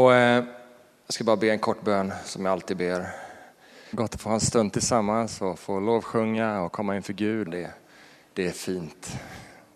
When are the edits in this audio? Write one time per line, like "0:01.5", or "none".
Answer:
0:03.9
0:07.5